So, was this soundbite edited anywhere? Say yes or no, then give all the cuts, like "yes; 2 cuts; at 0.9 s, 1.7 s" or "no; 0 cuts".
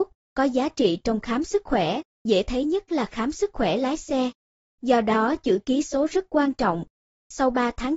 no; 0 cuts